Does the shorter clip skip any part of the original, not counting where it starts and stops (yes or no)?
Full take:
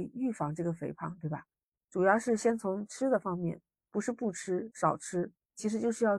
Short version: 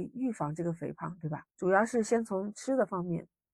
yes